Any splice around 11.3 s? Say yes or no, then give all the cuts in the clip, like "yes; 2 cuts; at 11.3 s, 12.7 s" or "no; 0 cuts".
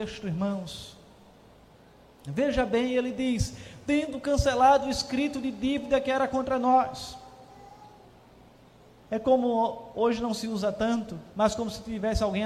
yes; 1 cut; at 11.3 s